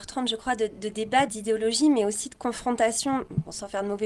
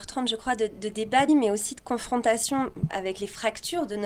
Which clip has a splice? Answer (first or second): second